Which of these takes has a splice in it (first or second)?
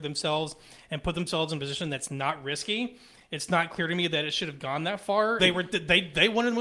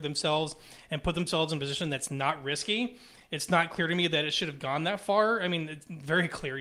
first